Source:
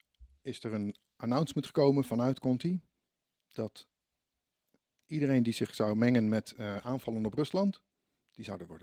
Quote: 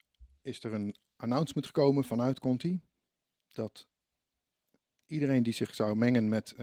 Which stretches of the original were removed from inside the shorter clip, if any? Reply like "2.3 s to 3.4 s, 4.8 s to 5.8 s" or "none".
none